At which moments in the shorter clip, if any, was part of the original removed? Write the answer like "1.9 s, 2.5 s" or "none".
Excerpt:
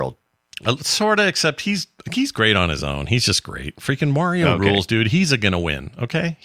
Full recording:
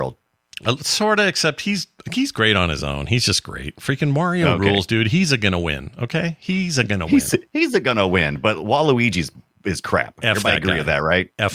none